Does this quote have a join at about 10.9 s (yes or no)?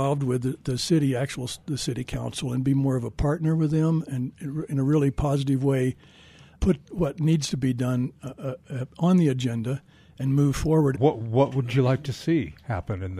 yes